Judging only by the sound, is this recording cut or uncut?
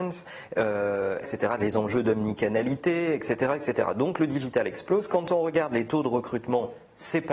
cut